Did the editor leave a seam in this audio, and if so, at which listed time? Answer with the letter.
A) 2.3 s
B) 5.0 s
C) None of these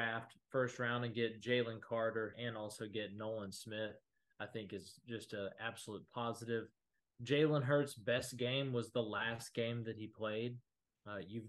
A